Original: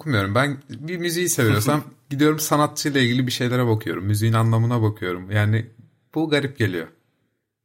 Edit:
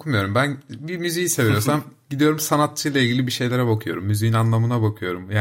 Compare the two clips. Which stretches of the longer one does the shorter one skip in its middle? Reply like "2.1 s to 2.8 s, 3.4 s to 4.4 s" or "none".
none